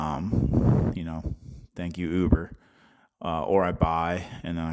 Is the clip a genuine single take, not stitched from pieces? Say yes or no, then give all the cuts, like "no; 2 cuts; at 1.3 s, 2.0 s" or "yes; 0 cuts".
yes; 0 cuts